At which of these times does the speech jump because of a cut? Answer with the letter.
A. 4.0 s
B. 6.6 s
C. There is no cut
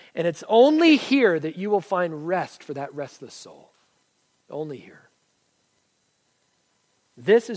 C